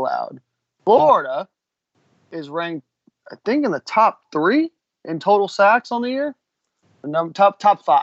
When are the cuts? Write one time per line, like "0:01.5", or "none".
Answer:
none